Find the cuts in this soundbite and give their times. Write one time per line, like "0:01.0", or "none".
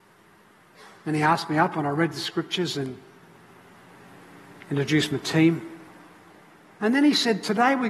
none